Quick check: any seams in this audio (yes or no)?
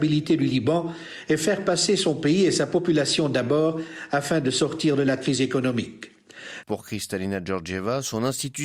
yes